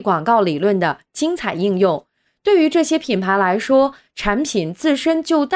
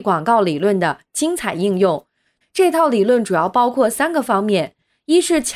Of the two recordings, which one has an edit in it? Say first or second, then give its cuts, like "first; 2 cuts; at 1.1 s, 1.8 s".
second; 1 cut; at 2.4 s